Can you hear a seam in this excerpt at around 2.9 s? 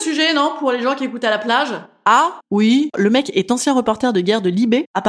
yes; 1 cut; at 2.9 s

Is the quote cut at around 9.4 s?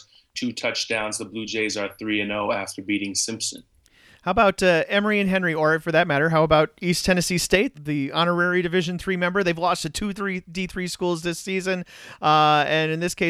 no; 1 cut; at 7.7 s

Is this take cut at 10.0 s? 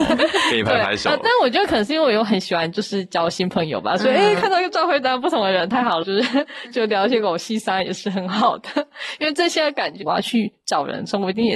yes; 2 cuts; at 6.0 s, 10.0 s

